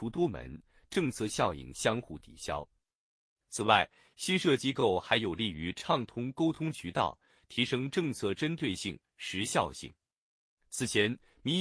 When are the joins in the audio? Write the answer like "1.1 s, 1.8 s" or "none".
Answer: none